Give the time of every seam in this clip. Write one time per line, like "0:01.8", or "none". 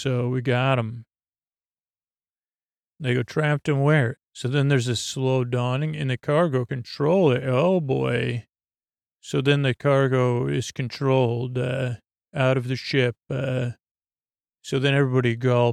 0:04.1